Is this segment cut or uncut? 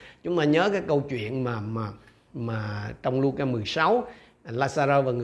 uncut